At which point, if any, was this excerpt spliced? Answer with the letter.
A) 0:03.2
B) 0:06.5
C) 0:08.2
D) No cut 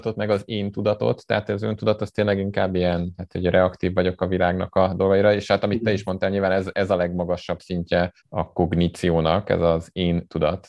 C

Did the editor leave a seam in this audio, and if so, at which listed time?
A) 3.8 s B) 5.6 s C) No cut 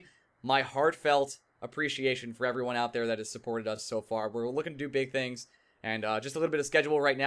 C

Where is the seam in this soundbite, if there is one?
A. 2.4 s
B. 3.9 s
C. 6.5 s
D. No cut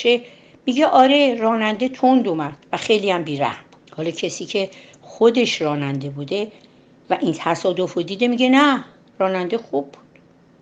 B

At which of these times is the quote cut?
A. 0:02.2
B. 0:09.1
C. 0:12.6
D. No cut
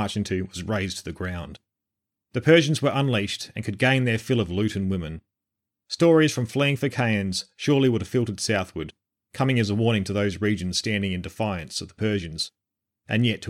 A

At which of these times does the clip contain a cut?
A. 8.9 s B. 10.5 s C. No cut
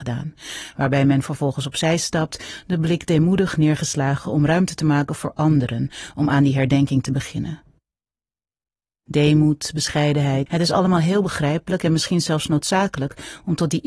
B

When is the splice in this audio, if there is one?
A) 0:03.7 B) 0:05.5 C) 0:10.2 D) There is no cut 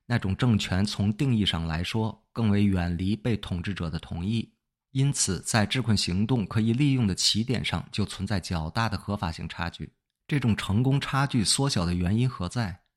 C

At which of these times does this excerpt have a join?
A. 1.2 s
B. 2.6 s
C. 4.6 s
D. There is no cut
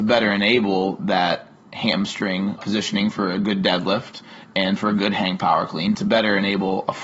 B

